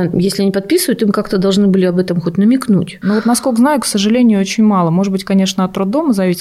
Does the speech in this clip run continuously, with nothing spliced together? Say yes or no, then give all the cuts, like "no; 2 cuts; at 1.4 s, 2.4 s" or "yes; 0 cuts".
yes; 0 cuts